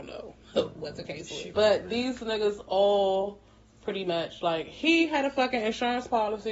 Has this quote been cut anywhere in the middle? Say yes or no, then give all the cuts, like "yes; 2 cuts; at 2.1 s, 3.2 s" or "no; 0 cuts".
yes; 1 cut; at 1.5 s